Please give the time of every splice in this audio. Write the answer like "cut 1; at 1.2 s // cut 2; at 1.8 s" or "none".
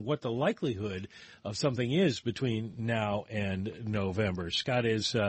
none

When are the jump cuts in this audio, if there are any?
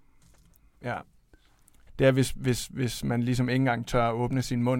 cut 1; at 1.9 s

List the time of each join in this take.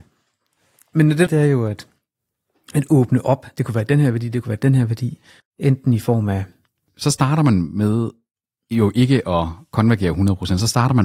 cut 1; at 1.3 s // cut 2; at 5.4 s

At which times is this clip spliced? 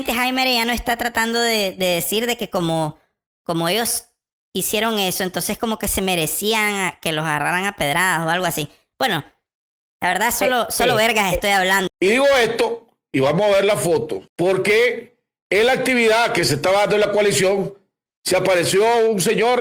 cut 1; at 11.9 s // cut 2; at 14.3 s

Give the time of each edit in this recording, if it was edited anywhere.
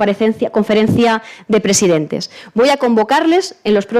none

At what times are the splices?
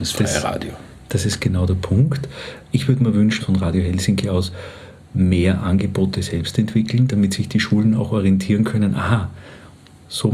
cut 1; at 3.4 s

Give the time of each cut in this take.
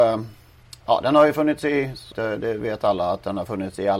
cut 1; at 2.1 s

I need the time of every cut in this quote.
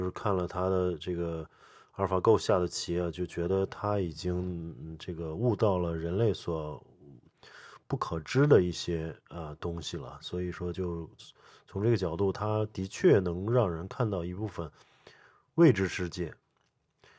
none

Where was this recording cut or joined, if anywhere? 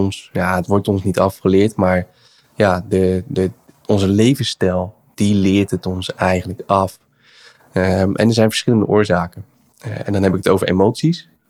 cut 1; at 9.7 s

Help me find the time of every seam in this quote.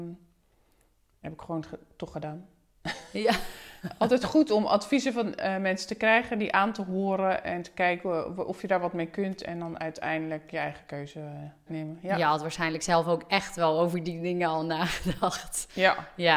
cut 1; at 11.7 s

